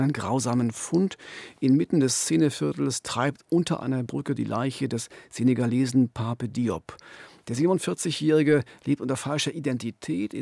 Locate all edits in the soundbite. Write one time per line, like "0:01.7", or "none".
none